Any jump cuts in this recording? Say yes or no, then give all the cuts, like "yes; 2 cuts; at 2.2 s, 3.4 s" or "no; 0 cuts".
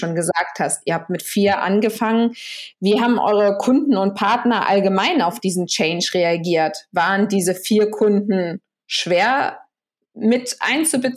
no; 0 cuts